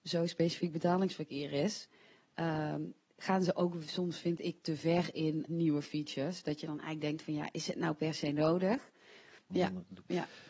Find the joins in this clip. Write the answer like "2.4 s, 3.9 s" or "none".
5.5 s, 9.5 s

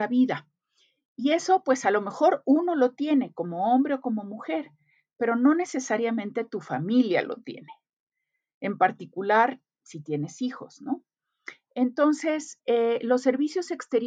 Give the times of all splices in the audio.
12.6 s

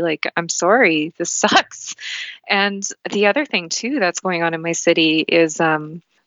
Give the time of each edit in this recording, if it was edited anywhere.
3.0 s

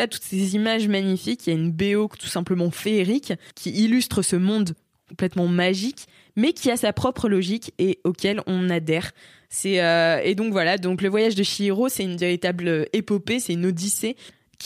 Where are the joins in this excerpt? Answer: none

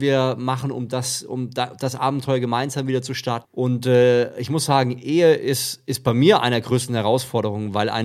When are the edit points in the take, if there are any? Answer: 3.4 s

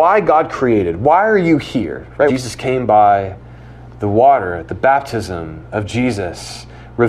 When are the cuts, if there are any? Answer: 2.3 s

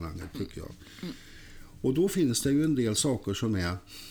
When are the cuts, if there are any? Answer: none

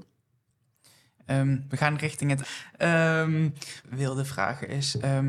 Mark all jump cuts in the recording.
2.4 s, 3.8 s

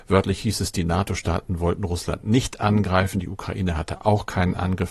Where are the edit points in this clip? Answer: none

